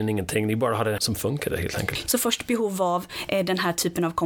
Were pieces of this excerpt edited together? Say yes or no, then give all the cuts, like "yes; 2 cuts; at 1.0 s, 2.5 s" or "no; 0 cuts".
yes; 2 cuts; at 1.0 s, 2.1 s